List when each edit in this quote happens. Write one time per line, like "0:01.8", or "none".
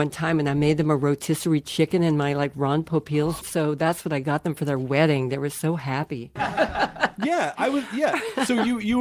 0:03.4
0:06.4